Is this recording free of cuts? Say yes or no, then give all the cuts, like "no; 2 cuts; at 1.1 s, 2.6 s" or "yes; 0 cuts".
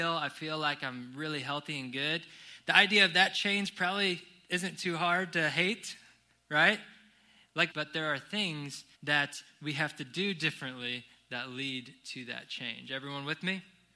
no; 2 cuts; at 7.7 s, 8.9 s